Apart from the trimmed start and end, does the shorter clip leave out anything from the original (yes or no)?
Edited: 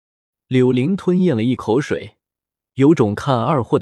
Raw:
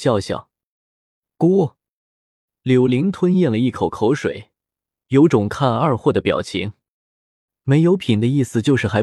yes